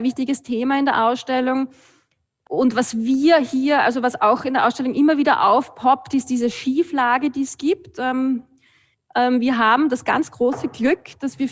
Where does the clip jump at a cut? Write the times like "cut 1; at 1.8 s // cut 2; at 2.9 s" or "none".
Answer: cut 1; at 8.9 s